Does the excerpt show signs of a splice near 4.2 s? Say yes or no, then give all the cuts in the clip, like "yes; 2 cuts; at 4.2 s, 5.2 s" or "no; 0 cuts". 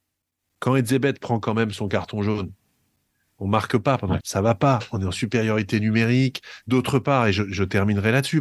yes; 2 cuts; at 4.2 s, 6.6 s